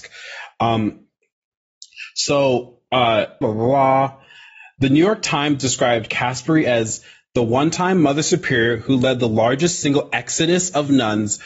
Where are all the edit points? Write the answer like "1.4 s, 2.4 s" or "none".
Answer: 3.4 s